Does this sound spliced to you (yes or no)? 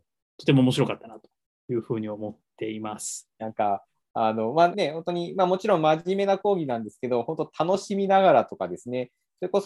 yes